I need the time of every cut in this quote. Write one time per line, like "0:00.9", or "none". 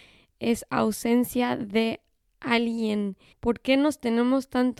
0:03.3